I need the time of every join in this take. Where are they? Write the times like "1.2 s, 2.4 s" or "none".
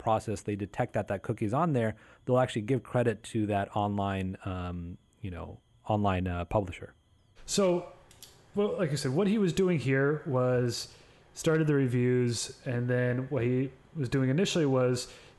none